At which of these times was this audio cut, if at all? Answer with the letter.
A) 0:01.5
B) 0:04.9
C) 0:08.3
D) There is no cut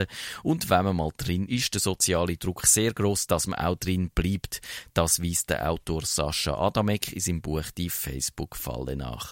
A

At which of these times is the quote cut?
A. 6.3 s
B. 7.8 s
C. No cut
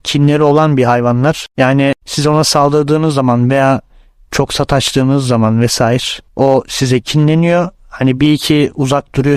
A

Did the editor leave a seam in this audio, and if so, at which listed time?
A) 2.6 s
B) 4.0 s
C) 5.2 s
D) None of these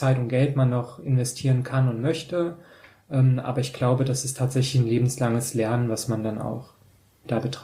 D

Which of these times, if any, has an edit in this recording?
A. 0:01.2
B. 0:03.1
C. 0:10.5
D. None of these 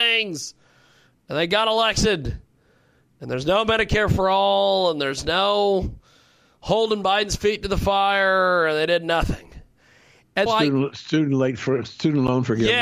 C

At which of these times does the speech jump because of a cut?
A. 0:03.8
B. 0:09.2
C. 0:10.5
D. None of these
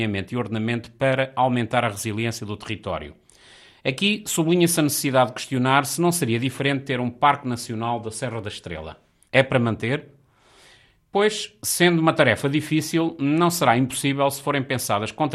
B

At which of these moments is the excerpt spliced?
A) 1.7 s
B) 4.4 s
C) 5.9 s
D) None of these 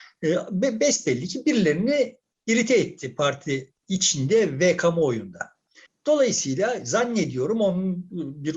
D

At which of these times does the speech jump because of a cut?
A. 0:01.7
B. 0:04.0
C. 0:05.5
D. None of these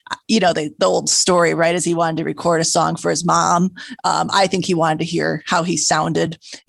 D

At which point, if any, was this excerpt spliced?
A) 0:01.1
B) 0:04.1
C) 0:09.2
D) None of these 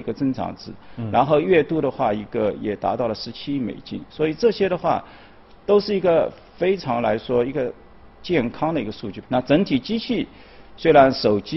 C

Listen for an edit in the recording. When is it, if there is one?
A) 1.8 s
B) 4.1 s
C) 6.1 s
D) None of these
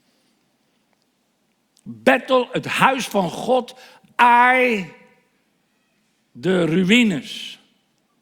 D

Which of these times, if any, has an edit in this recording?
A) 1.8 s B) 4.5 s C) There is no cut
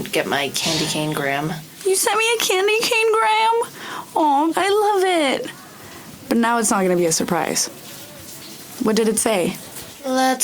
B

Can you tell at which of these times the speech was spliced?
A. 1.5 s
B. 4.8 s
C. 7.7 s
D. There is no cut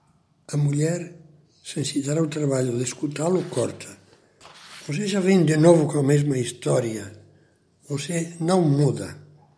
D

